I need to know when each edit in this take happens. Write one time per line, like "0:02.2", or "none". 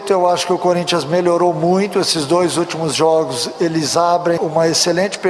0:04.4

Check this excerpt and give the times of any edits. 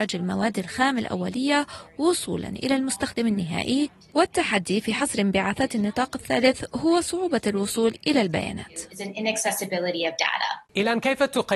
0:10.7

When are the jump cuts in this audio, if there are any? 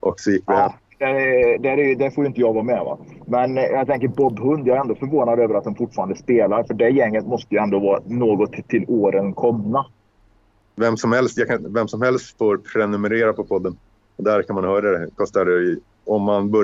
none

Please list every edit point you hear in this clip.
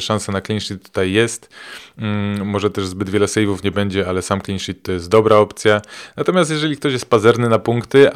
none

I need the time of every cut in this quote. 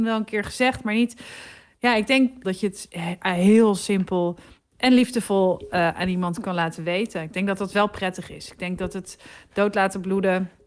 0:02.4

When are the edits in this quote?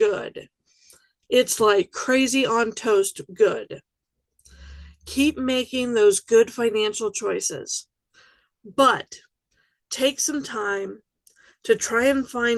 none

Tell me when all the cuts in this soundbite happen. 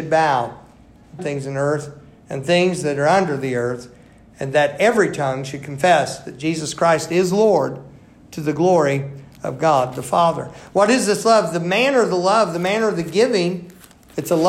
0:01.2

